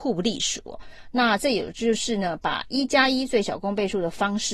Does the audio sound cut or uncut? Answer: uncut